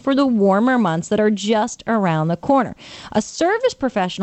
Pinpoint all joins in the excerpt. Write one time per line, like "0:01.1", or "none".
none